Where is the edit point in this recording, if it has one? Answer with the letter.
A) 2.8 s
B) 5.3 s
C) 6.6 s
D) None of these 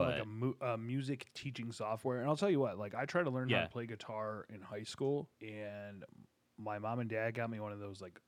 B